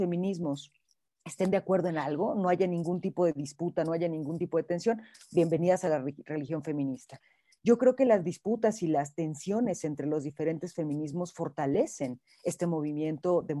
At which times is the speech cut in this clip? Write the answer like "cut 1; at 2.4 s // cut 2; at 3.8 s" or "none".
none